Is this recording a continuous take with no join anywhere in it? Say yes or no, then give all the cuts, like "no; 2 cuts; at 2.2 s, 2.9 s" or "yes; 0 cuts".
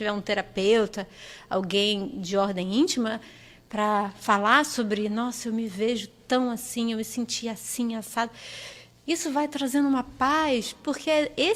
yes; 0 cuts